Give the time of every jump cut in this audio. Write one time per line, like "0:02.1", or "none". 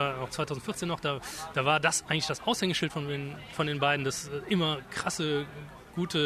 none